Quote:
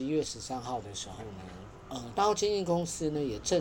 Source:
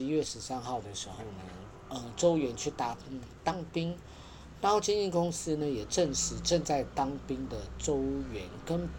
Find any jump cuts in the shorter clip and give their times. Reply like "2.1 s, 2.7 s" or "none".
2.1 s